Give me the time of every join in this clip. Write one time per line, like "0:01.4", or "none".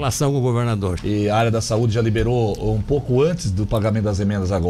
0:01.0